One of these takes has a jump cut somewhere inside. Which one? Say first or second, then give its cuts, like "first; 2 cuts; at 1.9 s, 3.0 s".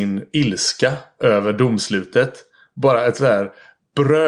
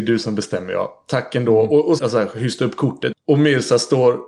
second; 2 cuts; at 2.0 s, 3.1 s